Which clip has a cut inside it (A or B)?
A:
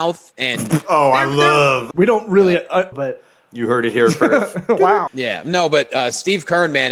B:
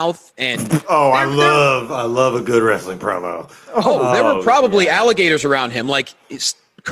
A